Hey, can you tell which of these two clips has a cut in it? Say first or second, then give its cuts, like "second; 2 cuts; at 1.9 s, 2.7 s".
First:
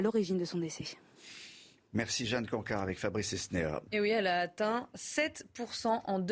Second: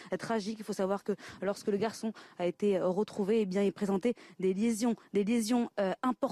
first; 1 cut; at 3.9 s